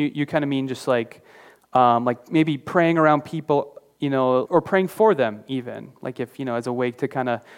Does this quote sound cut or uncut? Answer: cut